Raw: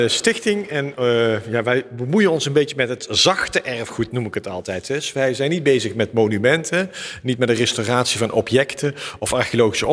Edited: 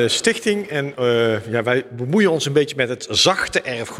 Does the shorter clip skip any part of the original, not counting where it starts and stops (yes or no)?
no